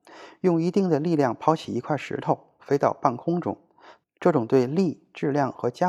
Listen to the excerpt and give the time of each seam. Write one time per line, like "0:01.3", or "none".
0:02.6
0:04.0